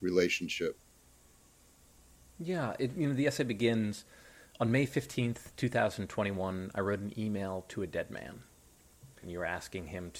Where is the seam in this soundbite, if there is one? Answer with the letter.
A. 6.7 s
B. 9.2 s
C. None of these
B